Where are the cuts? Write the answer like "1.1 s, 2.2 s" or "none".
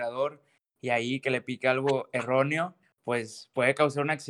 none